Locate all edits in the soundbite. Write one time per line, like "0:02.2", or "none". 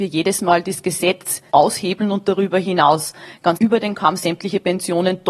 0:01.5
0:03.6